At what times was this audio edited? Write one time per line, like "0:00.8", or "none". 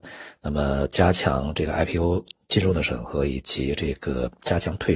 none